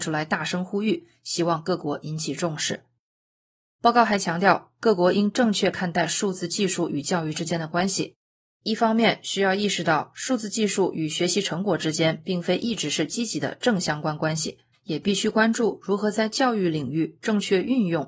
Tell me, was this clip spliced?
yes; 1 cut; at 14.7 s

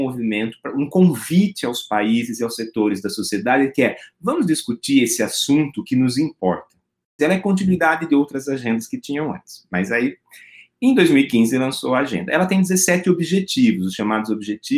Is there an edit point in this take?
yes; 1 cut; at 7.2 s

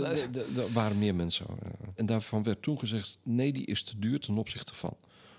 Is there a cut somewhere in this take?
yes; 1 cut; at 2.0 s

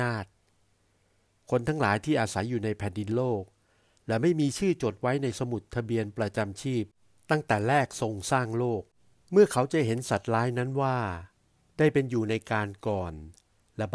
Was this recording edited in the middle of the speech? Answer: no; 0 cuts

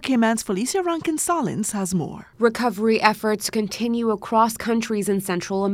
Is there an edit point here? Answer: no; 0 cuts

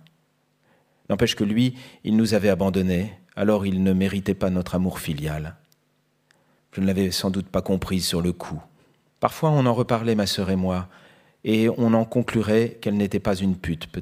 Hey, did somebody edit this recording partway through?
yes; 2 cuts; at 6.6 s, 9.2 s

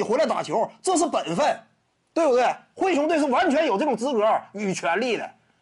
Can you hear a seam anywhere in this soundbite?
no; 0 cuts

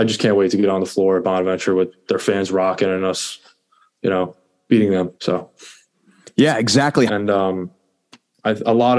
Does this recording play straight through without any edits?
no; 2 cuts; at 5.2 s, 7.1 s

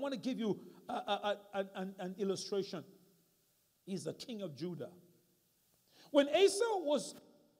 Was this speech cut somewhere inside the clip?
yes; 1 cut; at 3.7 s

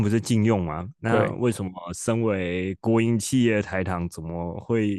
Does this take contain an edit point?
no; 0 cuts

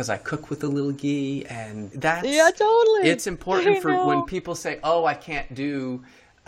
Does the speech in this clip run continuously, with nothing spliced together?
no; 1 cut; at 1.9 s

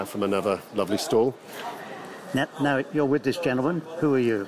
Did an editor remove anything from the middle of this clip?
no; 0 cuts

